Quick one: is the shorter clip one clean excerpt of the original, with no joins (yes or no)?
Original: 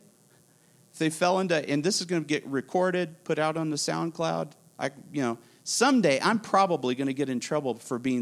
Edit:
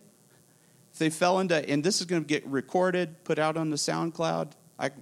yes